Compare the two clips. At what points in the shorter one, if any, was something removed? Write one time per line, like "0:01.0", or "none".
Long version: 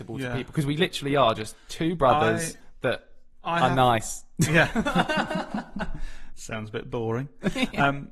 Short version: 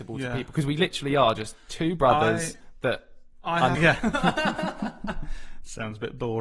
0:03.7